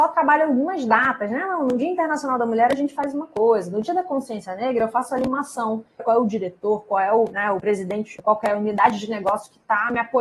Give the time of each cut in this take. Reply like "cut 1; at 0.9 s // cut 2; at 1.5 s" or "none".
cut 1; at 6.0 s